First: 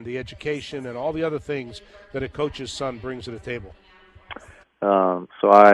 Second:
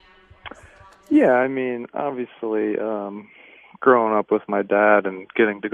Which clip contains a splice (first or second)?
first